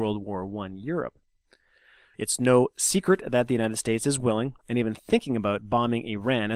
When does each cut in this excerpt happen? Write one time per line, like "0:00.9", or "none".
0:02.1

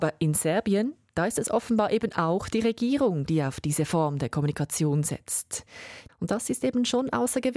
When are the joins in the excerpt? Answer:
0:06.1

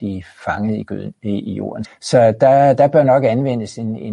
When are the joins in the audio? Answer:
0:01.8

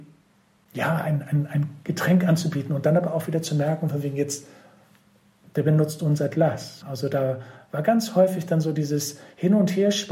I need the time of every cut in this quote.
none

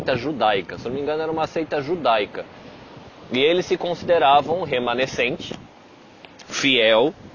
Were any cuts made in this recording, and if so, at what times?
none

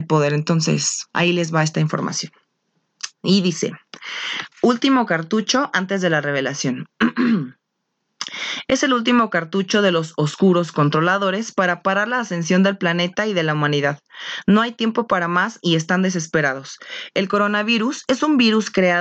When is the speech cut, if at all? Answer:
0:04.5

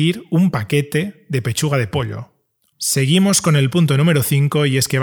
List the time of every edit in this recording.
0:02.7

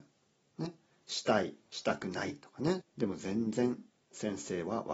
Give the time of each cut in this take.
0:02.8

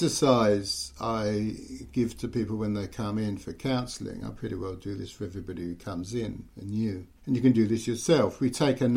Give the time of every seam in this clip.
0:07.2

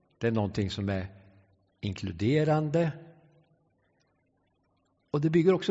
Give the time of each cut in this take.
none

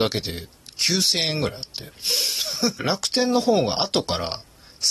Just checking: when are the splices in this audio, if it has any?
0:02.8

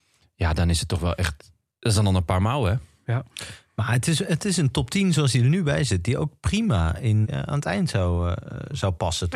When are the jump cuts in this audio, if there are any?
0:07.2

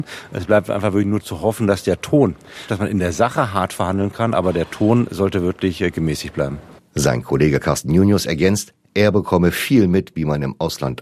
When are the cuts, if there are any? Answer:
0:02.7

